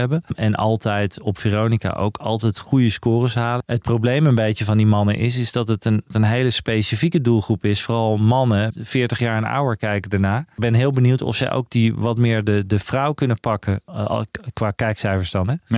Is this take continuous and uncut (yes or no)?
yes